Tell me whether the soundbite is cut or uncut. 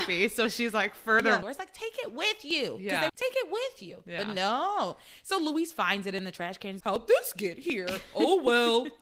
cut